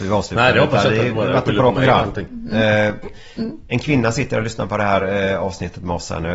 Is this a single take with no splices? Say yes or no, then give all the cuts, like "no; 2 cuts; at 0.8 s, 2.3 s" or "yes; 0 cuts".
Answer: yes; 0 cuts